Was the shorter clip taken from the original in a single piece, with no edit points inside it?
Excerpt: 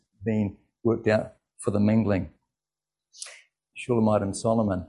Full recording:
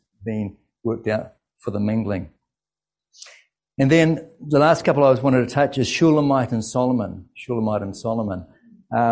no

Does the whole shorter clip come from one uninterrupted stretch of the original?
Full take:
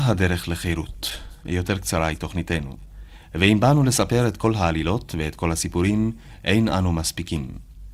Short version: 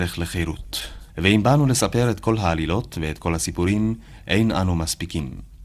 no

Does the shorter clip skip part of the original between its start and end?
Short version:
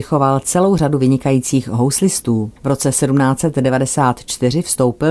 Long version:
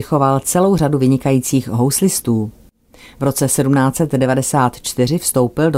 yes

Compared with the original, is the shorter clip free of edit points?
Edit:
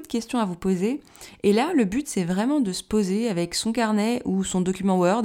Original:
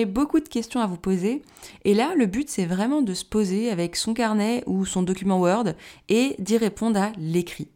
yes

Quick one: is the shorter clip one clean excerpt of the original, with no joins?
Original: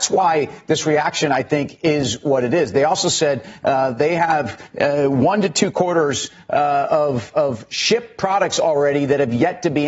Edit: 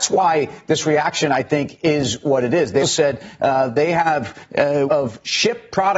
no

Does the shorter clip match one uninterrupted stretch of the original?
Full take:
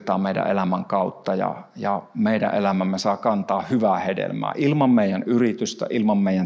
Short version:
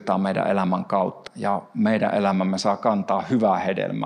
no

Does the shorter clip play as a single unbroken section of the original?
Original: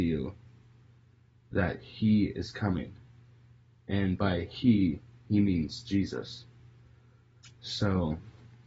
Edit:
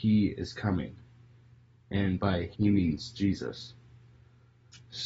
no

